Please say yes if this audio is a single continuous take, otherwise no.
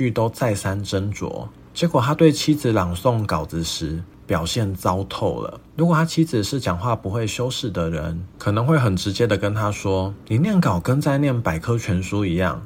yes